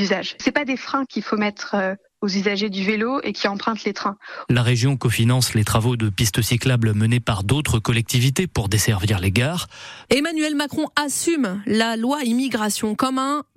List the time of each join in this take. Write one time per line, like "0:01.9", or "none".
0:04.5
0:10.1